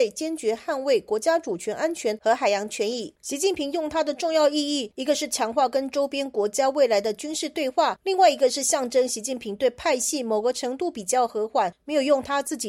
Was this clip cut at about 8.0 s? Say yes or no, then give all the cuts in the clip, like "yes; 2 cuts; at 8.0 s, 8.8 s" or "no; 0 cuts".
no; 1 cut; at 3.2 s